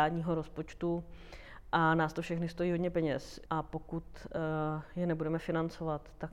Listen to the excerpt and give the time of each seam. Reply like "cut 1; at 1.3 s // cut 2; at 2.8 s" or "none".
cut 1; at 3.5 s